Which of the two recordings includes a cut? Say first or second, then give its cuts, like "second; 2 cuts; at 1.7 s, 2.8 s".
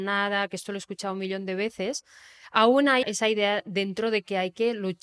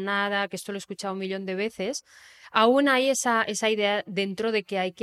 first; 1 cut; at 3.0 s